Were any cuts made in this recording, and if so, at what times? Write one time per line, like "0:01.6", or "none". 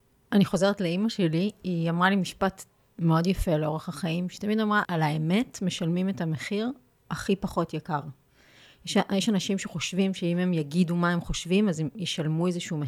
0:04.8